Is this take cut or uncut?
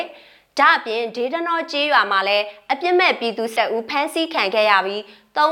cut